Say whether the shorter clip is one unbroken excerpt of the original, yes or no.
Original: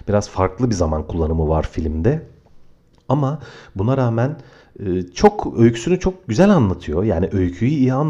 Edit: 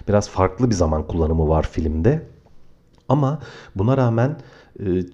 yes